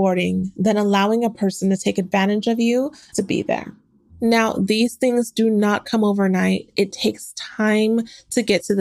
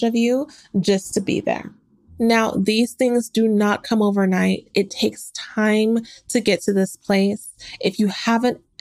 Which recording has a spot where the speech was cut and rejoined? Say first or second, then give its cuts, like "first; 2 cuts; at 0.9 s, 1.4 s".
first; 1 cut; at 3.1 s